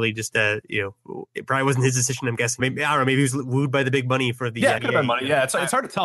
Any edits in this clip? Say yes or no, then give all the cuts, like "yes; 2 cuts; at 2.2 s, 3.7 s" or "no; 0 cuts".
yes; 2 cuts; at 2.6 s, 4.8 s